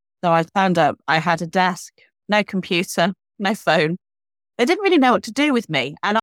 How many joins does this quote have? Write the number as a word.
zero